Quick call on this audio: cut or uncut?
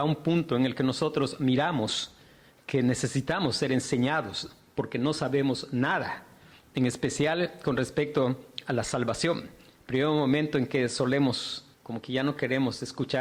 cut